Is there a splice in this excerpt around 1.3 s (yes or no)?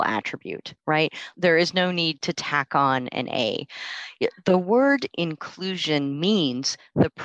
yes